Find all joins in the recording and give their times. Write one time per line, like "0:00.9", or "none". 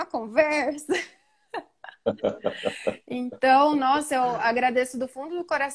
none